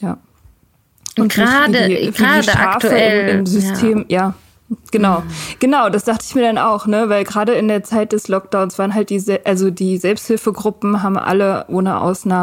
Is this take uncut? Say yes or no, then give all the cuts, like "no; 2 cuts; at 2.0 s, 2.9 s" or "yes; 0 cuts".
yes; 0 cuts